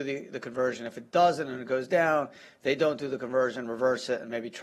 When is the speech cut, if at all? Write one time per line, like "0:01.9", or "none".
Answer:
none